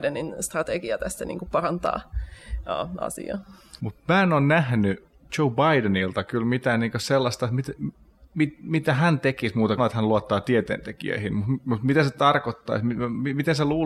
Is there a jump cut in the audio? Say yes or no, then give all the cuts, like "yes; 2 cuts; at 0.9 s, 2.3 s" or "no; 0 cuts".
yes; 2 cuts; at 3.8 s, 9.8 s